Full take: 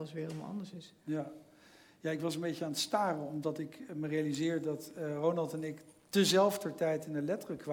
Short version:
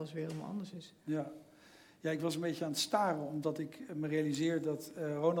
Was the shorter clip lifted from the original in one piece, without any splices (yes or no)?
yes